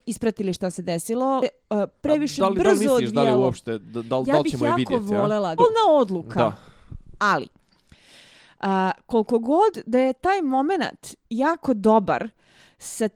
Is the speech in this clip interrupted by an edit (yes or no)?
yes